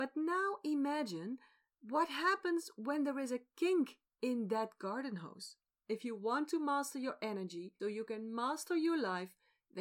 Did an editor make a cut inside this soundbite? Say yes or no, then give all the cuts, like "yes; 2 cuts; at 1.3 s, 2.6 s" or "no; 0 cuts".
yes; 2 cuts; at 5.8 s, 7.8 s